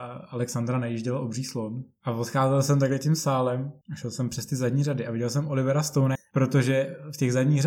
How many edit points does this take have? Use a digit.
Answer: 2